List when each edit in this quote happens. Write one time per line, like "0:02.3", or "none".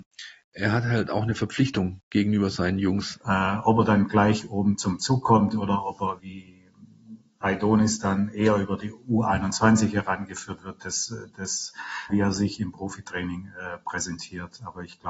0:03.2
0:06.2
0:12.1